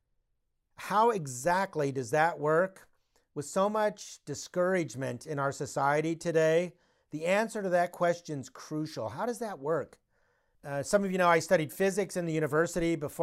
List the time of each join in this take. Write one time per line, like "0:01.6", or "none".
0:10.5